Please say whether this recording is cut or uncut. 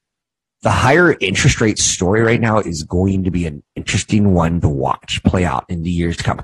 uncut